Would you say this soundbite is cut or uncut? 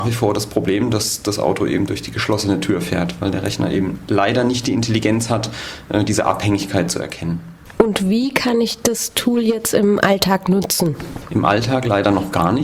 uncut